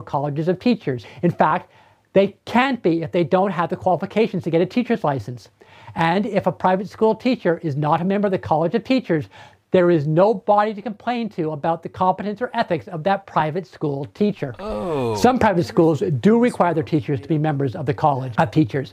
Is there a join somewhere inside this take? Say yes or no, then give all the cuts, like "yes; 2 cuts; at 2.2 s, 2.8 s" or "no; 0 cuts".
no; 0 cuts